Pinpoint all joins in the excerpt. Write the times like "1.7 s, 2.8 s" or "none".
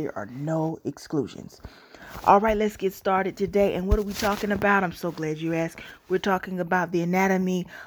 none